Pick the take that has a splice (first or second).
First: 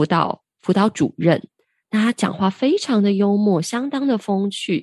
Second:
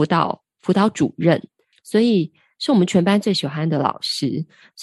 second